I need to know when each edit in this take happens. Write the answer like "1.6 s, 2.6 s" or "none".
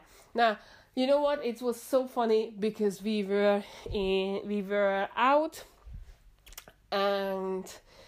none